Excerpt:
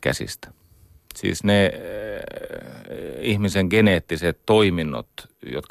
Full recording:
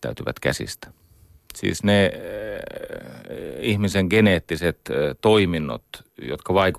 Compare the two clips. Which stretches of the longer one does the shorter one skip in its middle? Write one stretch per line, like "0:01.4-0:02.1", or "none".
0:04.8-0:05.2